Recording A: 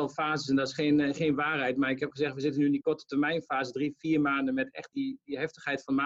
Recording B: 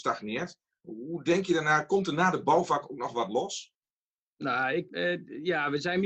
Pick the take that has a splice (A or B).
B